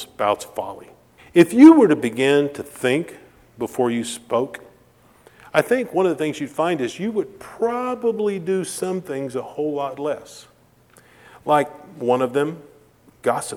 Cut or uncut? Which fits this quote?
cut